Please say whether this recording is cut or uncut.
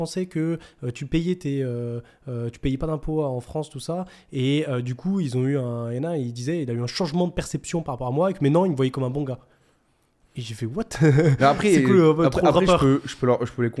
uncut